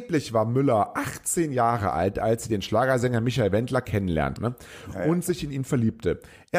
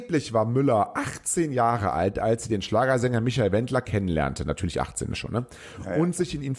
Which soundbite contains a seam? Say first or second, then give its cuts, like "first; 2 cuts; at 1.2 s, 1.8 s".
first; 1 cut; at 4.4 s